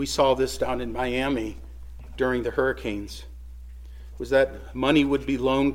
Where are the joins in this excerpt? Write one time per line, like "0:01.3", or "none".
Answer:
0:02.1